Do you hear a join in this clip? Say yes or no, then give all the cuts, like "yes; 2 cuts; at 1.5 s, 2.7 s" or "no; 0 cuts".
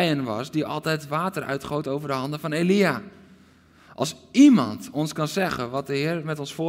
no; 0 cuts